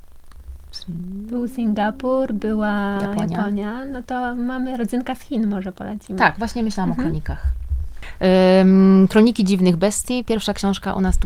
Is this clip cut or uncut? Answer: uncut